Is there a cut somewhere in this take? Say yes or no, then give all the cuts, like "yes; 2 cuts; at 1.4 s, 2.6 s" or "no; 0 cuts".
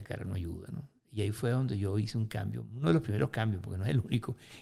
no; 0 cuts